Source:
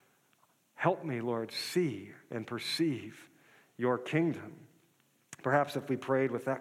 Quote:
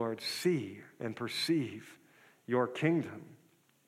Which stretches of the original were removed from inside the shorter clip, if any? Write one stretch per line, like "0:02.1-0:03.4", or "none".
none